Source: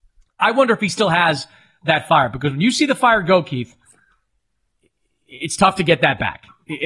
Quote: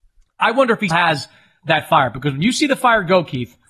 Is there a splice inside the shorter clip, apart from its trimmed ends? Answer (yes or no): yes